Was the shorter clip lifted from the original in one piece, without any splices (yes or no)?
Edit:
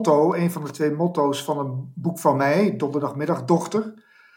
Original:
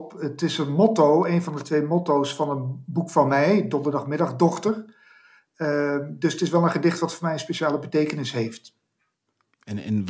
yes